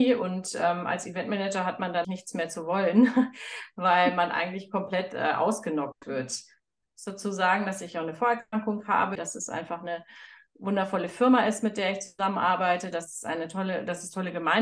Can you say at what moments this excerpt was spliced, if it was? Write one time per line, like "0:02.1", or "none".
0:02.0
0:06.8
0:09.2